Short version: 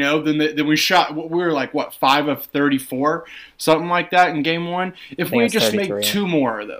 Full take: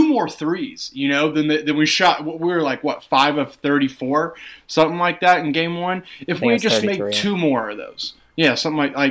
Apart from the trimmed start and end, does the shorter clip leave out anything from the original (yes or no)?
no